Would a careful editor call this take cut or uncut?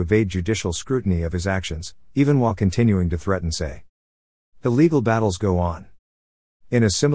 uncut